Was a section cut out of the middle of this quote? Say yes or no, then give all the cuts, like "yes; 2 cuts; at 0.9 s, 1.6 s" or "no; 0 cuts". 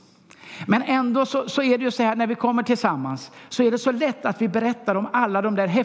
no; 0 cuts